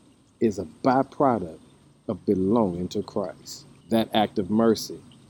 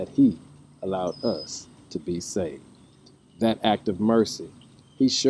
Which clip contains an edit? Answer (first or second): first